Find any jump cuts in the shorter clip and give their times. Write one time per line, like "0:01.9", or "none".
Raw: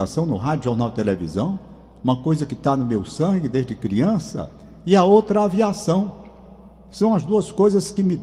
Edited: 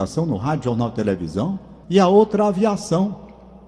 0:01.8